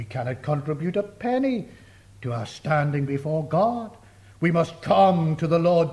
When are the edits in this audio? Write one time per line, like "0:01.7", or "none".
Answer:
none